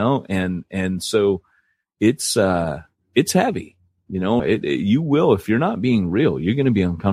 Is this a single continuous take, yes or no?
no